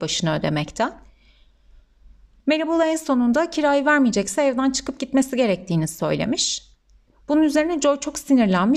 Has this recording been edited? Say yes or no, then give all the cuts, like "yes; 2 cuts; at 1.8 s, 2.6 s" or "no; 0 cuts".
no; 0 cuts